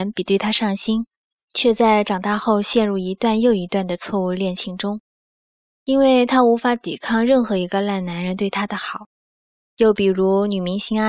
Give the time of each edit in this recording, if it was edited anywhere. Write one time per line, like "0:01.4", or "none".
0:01.4